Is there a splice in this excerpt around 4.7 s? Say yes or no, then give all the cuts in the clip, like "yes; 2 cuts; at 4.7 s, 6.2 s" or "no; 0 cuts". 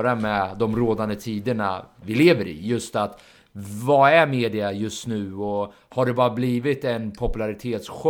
no; 0 cuts